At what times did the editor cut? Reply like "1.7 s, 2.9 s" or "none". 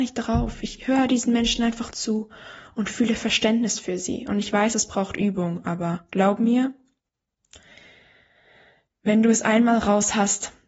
none